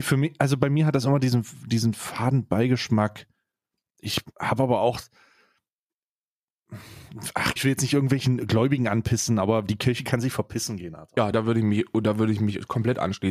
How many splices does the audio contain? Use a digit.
2